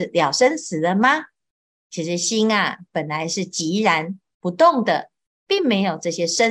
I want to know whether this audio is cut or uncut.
uncut